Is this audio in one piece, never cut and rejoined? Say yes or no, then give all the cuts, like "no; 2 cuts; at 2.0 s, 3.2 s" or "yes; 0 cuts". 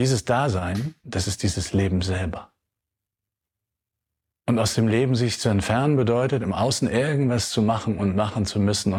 no; 1 cut; at 1.0 s